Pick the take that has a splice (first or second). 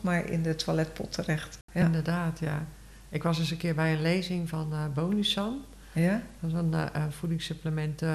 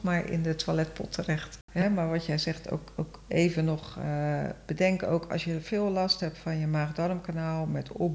second